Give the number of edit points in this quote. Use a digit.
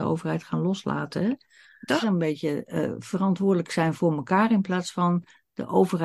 1